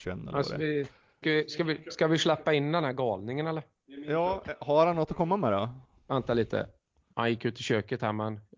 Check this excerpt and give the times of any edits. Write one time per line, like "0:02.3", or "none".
0:01.2